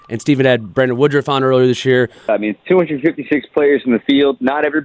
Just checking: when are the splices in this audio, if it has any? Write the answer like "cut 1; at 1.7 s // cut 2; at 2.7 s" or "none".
cut 1; at 2.3 s